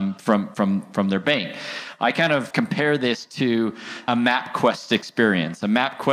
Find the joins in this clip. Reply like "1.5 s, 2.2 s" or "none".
2.5 s, 4.1 s